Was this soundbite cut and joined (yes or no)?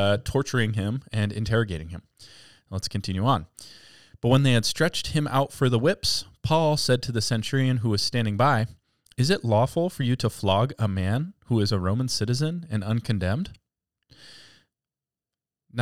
no